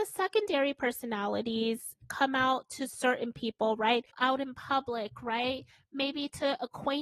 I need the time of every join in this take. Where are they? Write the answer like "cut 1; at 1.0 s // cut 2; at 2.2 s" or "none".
cut 1; at 4.1 s